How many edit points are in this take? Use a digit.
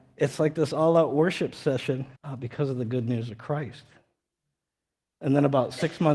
1